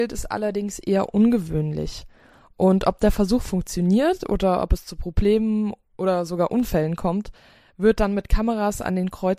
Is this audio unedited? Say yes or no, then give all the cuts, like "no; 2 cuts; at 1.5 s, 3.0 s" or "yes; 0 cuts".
yes; 0 cuts